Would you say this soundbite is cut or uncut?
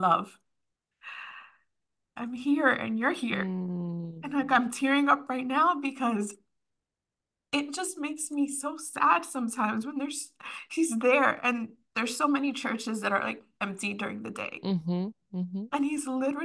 uncut